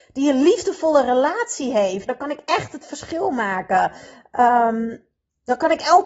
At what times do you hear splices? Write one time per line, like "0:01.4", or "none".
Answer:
0:02.1